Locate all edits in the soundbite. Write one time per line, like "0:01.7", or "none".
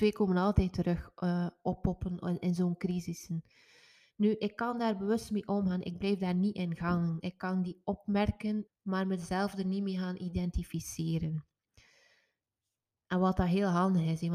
0:08.7